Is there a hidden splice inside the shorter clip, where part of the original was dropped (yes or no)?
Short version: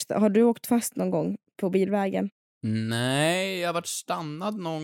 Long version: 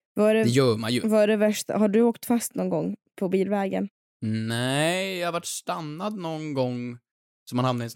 no